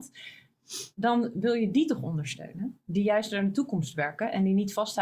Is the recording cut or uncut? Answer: uncut